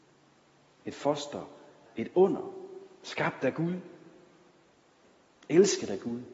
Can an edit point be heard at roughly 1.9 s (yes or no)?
yes